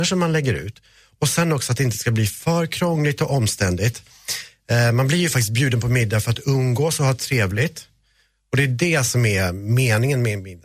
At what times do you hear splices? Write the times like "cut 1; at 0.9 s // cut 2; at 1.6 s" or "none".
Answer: none